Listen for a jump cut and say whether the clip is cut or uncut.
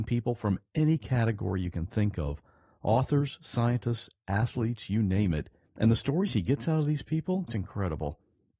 cut